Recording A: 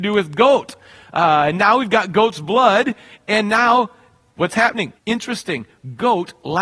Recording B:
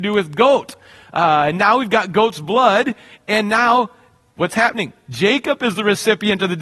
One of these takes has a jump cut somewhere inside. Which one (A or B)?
A